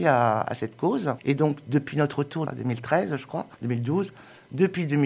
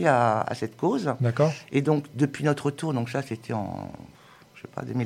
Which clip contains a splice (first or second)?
first